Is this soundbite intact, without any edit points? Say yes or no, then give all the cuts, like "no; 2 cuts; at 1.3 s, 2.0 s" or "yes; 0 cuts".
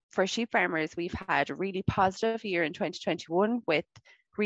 yes; 0 cuts